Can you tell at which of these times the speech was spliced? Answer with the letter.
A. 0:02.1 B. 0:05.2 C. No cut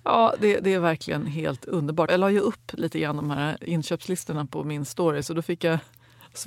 A